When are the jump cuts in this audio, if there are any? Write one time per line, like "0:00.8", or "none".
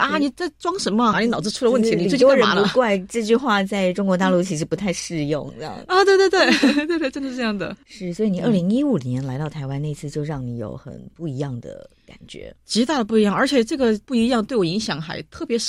0:01.1
0:07.8